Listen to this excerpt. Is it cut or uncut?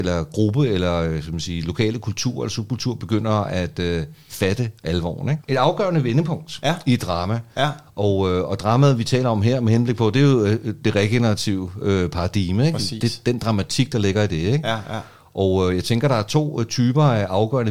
cut